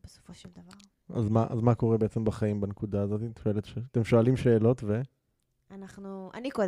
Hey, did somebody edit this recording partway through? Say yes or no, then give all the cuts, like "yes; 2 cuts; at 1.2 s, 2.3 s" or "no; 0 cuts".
no; 0 cuts